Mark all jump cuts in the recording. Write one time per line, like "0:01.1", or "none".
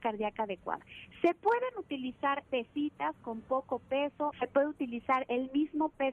0:02.4
0:04.3